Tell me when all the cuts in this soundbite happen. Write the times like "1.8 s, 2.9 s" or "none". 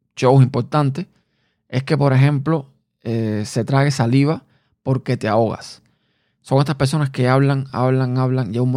none